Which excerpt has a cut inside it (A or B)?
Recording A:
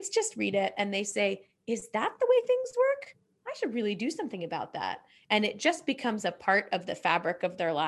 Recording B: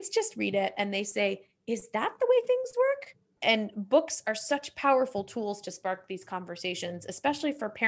B